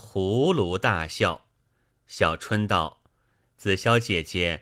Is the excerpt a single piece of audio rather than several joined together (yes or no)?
yes